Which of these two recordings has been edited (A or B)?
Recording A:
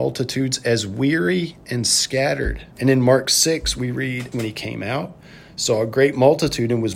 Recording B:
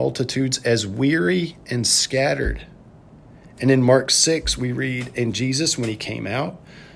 A